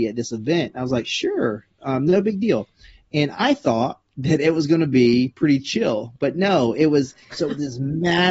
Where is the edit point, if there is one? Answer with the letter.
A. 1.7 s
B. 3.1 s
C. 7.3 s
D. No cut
C